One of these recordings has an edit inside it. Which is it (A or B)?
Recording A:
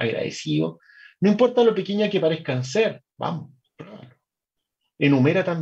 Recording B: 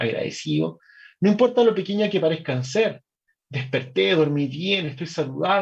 A